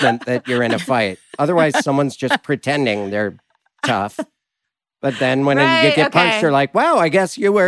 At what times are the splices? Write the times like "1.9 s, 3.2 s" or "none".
none